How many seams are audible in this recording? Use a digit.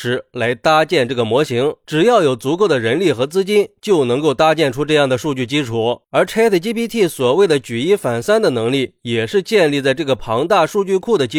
0